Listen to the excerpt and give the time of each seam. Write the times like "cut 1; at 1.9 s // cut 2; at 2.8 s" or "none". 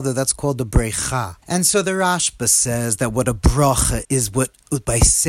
cut 1; at 1.4 s // cut 2; at 4.0 s